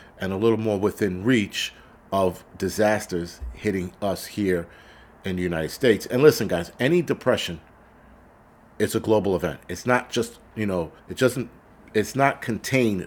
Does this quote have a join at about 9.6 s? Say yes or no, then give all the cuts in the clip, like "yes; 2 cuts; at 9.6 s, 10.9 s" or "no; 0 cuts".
no; 1 cut; at 11.0 s